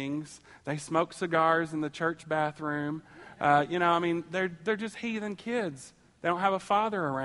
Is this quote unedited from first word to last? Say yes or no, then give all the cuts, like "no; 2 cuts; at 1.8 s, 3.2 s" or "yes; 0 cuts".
yes; 0 cuts